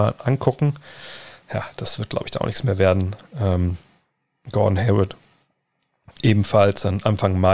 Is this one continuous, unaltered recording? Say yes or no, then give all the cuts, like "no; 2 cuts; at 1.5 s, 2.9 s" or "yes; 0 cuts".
yes; 0 cuts